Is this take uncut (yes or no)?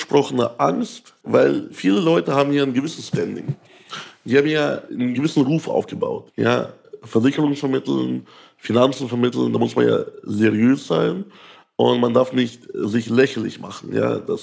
no